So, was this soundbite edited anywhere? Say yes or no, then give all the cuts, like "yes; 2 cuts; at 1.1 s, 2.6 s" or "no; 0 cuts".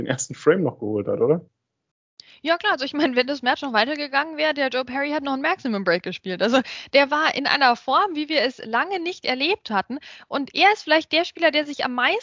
no; 0 cuts